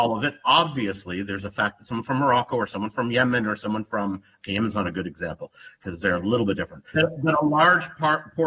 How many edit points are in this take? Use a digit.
1